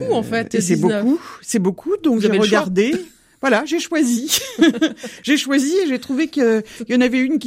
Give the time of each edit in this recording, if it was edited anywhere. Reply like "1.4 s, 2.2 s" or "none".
none